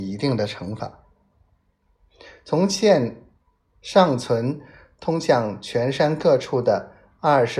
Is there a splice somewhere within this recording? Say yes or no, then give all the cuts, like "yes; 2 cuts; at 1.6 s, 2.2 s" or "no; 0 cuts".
no; 0 cuts